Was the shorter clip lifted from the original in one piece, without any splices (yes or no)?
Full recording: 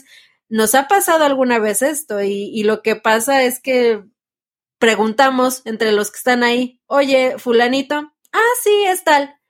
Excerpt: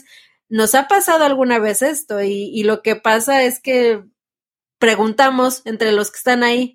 yes